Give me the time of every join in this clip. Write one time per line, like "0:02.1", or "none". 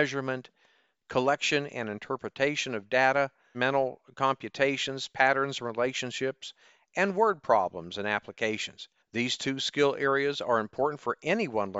0:03.5
0:09.0

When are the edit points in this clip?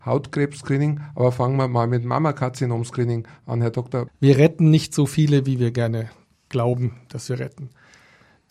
0:04.1

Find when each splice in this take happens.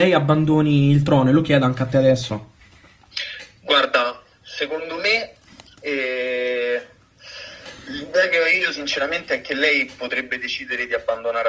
none

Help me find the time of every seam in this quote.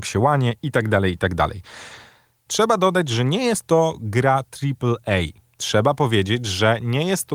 0:02.5

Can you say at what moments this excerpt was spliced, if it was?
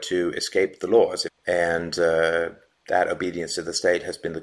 0:01.3

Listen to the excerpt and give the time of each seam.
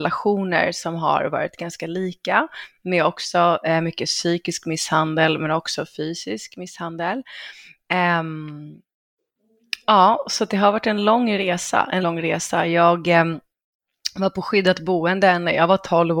0:12.0

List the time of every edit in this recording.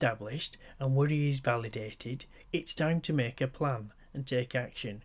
0:02.4

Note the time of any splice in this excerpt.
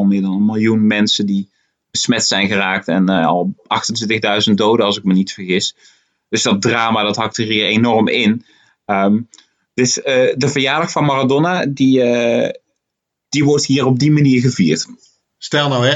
none

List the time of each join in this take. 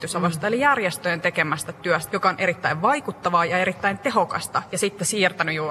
0:02.1

